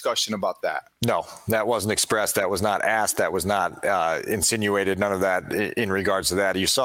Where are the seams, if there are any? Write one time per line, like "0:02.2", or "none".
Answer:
none

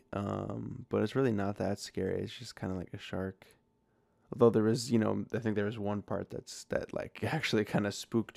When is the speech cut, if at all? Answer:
none

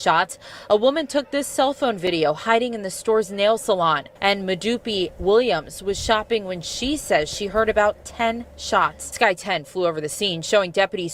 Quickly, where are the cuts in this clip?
0:04.2
0:09.1

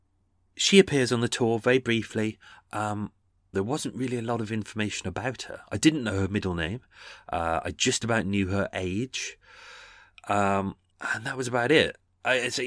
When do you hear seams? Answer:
0:03.5
0:10.9

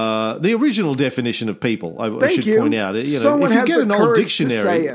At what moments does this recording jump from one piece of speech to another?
none

